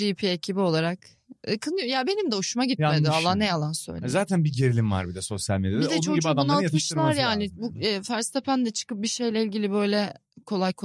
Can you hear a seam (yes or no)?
no